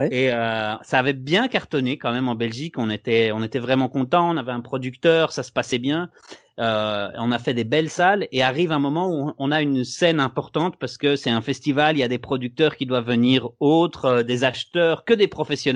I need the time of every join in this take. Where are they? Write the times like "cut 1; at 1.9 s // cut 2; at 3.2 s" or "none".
none